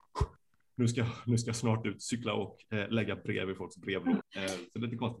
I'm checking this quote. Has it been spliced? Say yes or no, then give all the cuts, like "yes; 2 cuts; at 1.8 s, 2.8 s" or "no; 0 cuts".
yes; 1 cut; at 4.2 s